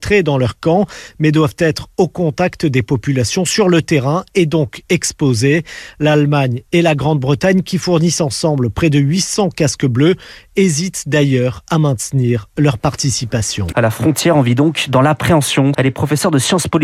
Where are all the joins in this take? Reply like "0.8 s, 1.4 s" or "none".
13.7 s, 15.7 s